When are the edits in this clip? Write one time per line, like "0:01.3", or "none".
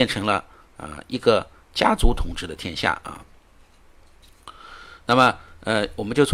none